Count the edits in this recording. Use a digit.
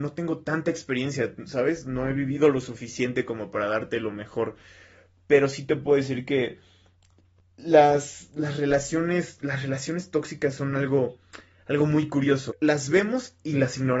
1